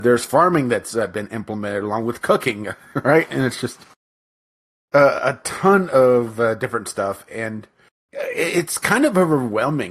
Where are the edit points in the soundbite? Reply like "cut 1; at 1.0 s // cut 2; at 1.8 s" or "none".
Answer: none